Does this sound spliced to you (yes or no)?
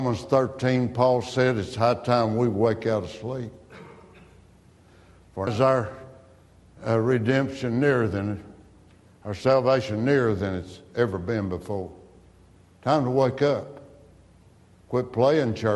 yes